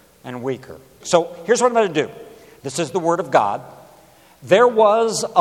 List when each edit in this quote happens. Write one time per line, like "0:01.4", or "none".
0:01.0
0:02.6

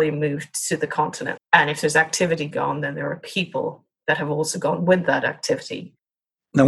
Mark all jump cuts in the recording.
0:01.4

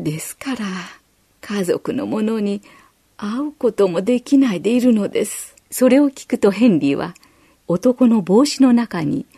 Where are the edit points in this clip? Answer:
0:05.6
0:07.6

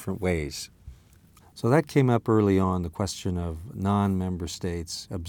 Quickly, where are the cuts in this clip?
0:01.4

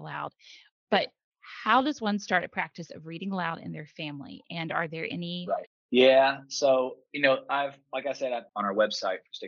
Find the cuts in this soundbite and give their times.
0:05.7

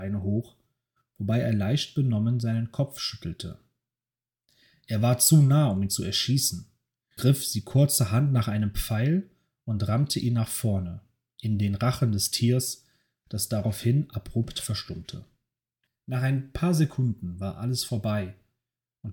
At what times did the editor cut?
0:07.2
0:15.9

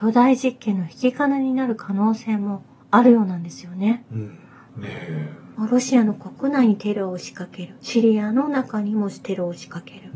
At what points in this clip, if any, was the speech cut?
0:04.7

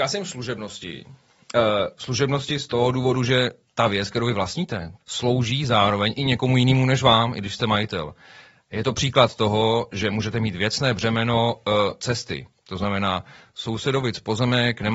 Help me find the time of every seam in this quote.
0:05.0

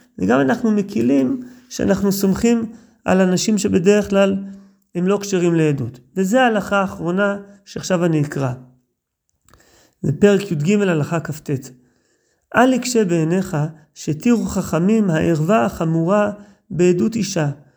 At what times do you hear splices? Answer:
none

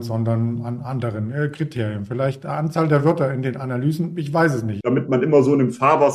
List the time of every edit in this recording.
0:04.8

